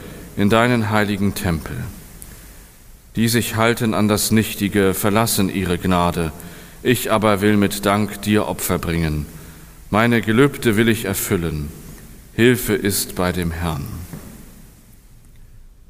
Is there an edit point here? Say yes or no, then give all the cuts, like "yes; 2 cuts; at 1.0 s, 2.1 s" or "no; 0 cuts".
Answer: no; 0 cuts